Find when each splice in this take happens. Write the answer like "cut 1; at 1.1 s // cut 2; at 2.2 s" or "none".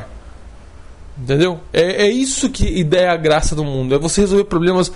none